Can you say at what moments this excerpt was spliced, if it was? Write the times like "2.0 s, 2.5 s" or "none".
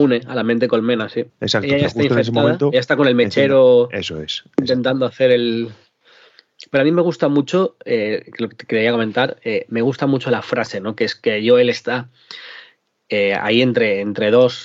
1.3 s